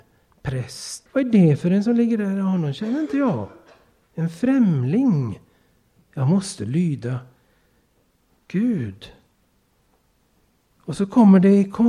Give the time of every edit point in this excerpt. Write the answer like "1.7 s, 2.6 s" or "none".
1.1 s